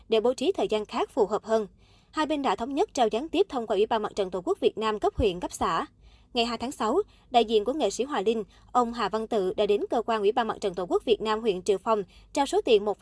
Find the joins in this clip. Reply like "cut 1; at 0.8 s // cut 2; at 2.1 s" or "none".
none